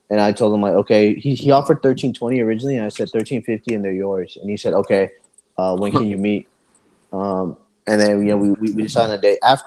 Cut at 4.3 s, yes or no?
no